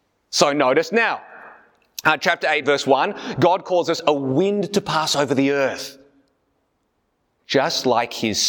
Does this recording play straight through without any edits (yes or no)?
yes